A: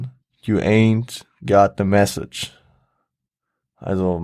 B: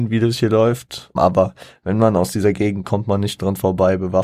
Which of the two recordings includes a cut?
B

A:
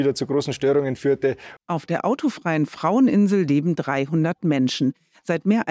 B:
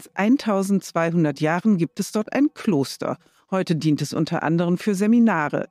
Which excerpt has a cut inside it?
A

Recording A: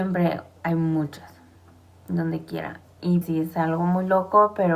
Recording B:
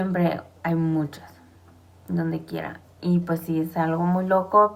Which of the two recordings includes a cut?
A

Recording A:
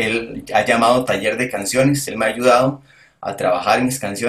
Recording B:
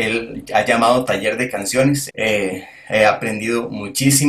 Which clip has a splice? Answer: B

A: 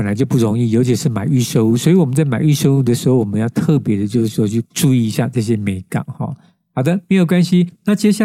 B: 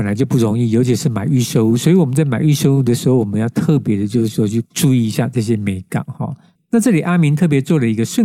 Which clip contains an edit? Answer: B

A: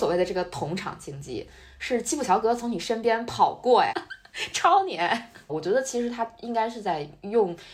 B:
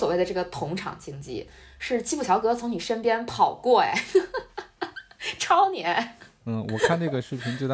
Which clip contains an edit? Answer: A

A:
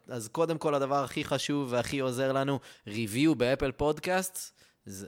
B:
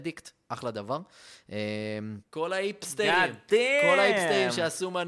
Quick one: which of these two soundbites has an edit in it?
B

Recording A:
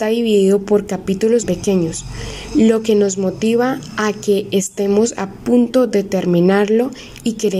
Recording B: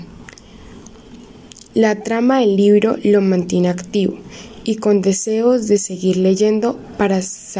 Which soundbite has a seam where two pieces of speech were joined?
A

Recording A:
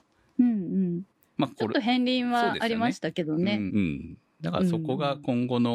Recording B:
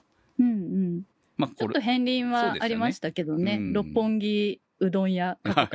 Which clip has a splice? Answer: A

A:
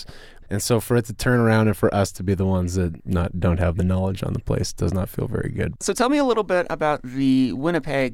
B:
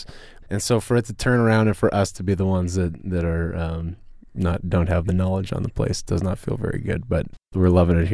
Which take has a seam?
A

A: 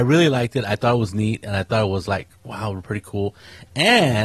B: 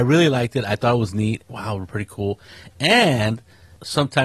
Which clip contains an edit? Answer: B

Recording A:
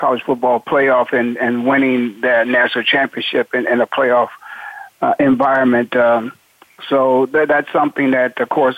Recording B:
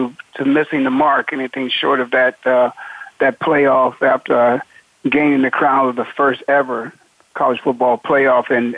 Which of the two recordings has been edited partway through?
B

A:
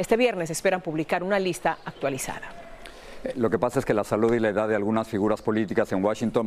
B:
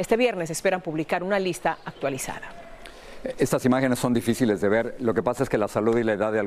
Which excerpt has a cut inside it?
A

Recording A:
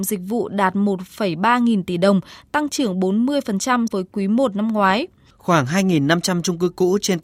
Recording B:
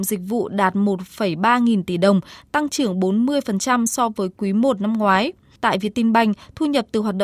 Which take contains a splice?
A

